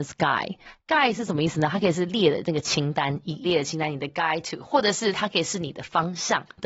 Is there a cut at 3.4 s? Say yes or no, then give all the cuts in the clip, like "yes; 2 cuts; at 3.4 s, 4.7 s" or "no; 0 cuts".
yes; 1 cut; at 3.4 s